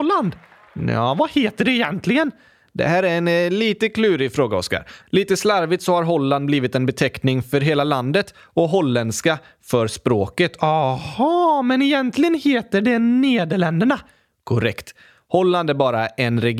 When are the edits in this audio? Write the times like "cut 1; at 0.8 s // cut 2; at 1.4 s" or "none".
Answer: cut 1; at 5.0 s

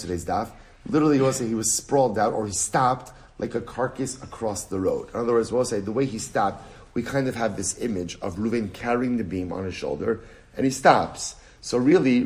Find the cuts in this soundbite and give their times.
none

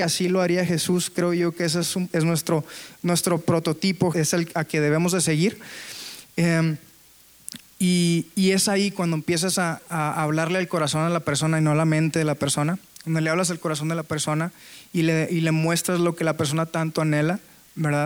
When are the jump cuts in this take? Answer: cut 1; at 2.1 s // cut 2; at 4.1 s

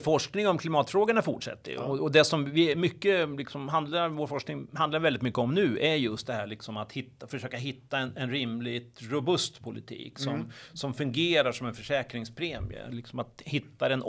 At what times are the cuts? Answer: none

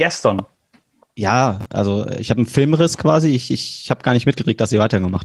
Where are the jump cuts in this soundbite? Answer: none

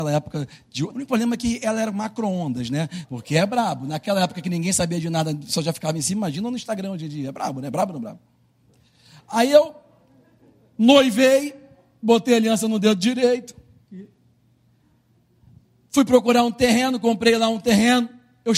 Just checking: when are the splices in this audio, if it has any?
cut 1; at 0.9 s // cut 2; at 3.0 s

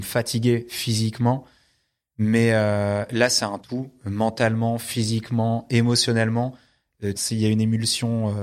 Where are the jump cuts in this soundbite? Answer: cut 1; at 7.2 s

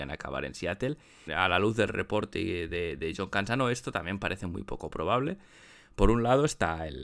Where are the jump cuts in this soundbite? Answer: cut 1; at 1.3 s

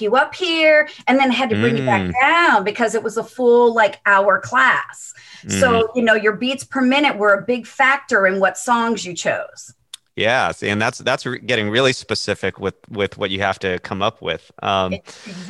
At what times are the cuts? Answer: none

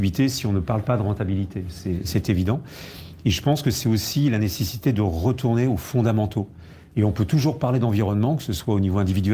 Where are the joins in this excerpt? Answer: cut 1; at 6.9 s

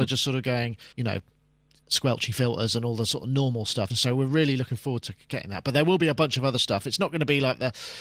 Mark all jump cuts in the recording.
cut 1; at 0.9 s // cut 2; at 3.9 s

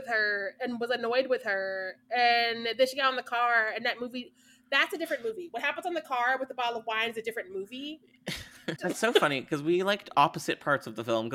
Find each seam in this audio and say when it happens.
cut 1; at 8.8 s

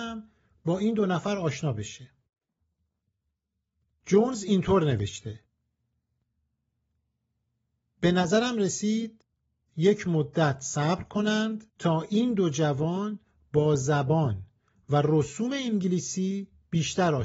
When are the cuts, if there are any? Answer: cut 1; at 11.7 s

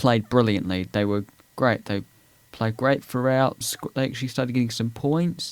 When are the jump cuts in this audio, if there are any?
cut 1; at 3.6 s

